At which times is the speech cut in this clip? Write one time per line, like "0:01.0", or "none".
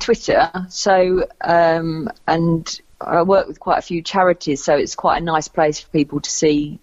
none